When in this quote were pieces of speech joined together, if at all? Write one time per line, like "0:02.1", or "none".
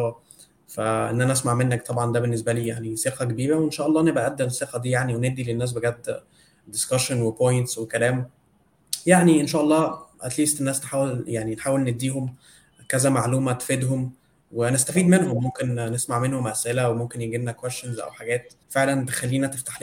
0:18.6

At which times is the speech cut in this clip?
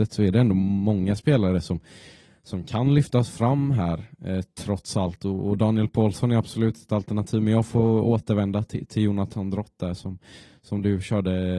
none

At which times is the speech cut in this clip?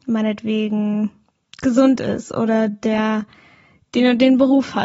none

